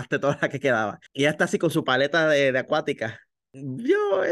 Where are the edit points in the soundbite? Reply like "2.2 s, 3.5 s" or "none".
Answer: none